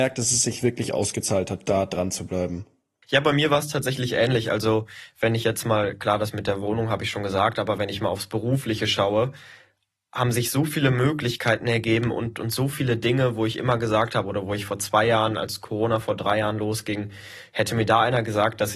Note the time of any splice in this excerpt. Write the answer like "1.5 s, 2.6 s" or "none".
none